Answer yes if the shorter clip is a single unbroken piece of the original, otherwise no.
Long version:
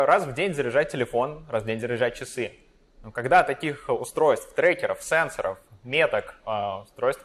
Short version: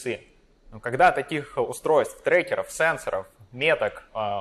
yes